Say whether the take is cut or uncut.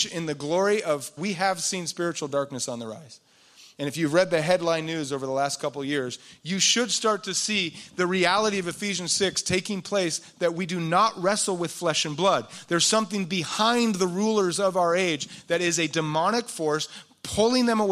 cut